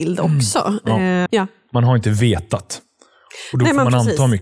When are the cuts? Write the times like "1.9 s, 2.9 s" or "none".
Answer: 1.3 s

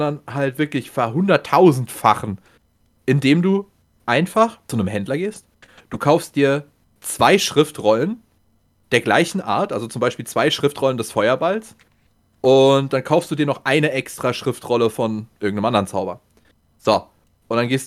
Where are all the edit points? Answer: none

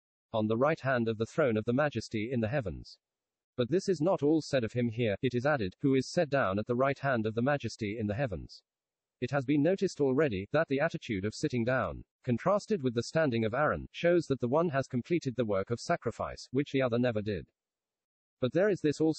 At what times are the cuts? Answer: 3.4 s, 12.1 s

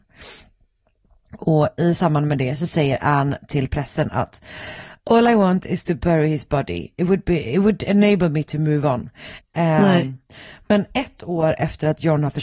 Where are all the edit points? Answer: 9.4 s

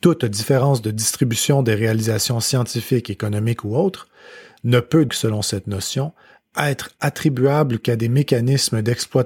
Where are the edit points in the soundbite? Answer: 5.1 s

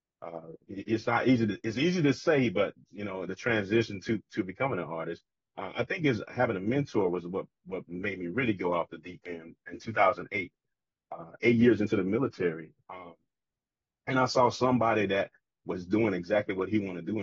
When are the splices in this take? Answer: none

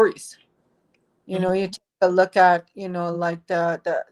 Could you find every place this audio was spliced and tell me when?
none

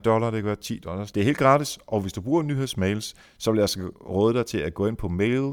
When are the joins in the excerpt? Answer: 1.1 s

